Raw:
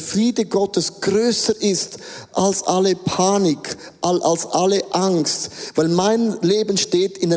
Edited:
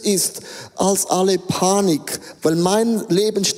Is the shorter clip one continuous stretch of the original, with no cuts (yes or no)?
no